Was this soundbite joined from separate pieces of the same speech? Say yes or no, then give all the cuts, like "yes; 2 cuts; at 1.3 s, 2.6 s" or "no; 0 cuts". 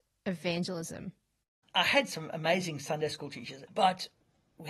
yes; 1 cut; at 3.7 s